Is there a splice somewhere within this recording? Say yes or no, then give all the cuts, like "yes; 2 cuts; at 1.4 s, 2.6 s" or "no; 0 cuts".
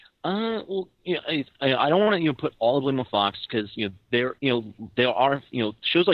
yes; 2 cuts; at 0.9 s, 4.4 s